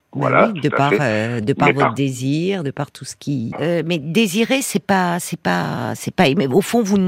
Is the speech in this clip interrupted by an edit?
yes; 1 cut; at 3.5 s

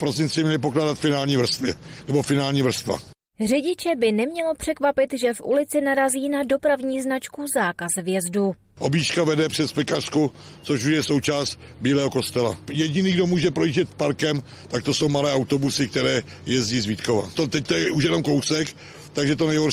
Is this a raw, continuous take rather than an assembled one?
no; 1 cut; at 17.3 s

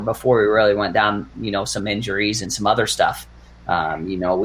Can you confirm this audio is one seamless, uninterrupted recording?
yes; 0 cuts

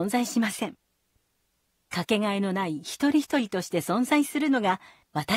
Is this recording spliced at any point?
no; 0 cuts

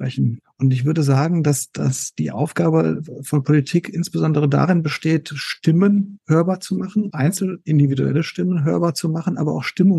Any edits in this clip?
yes; 1 cut; at 7.1 s

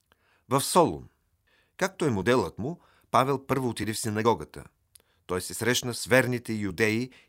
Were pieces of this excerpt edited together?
no; 0 cuts

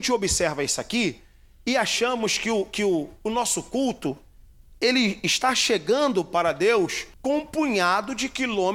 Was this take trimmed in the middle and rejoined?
yes; 1 cut; at 7.1 s

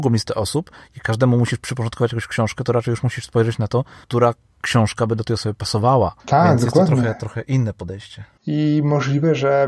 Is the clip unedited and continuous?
no; 2 cuts; at 6.2 s, 8.4 s

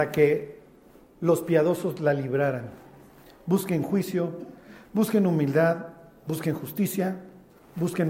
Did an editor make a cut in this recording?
no; 0 cuts

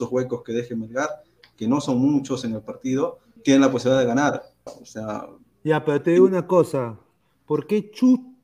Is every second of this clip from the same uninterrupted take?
no; 2 cuts; at 3.4 s, 4.7 s

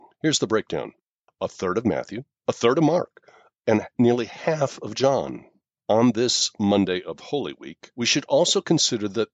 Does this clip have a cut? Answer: yes; 3 cuts; at 3.6 s, 5.8 s, 7.9 s

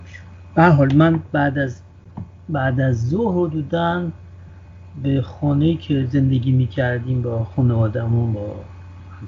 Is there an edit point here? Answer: no; 0 cuts

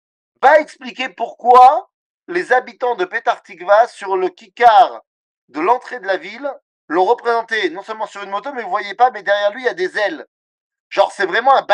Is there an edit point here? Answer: no; 0 cuts

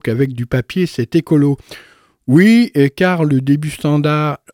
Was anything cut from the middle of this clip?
no; 0 cuts

